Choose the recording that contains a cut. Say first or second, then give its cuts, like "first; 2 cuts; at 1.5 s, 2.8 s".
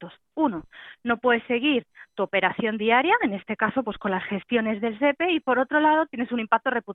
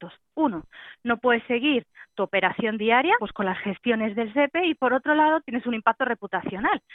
second; 1 cut; at 3.2 s